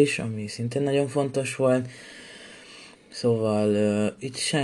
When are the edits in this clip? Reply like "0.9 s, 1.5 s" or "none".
2.9 s